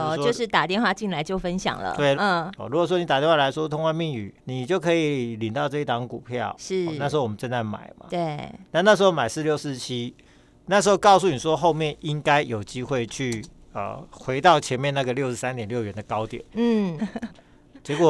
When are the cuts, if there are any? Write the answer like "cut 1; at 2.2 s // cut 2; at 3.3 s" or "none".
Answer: cut 1; at 2.1 s // cut 2; at 4.4 s // cut 3; at 17.0 s